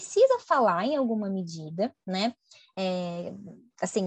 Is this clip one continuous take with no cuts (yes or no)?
yes